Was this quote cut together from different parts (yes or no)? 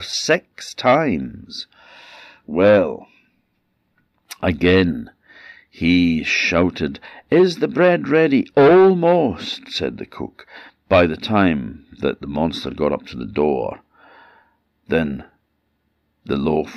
no